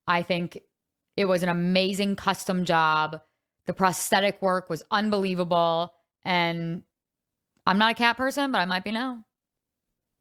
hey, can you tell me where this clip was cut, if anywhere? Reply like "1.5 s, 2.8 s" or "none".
none